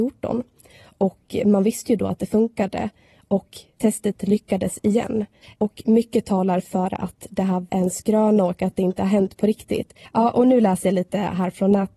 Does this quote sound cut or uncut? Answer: cut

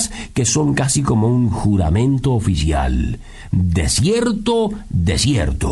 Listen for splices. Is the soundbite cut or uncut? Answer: uncut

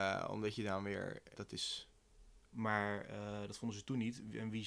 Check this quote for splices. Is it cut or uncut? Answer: cut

